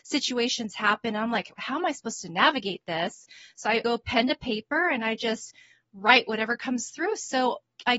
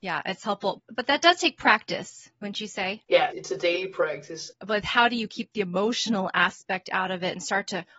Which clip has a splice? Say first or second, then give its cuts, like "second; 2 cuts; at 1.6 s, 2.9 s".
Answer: second; 1 cut; at 4.5 s